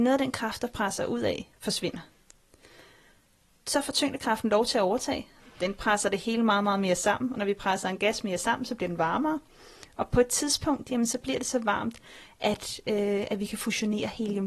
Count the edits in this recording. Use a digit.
1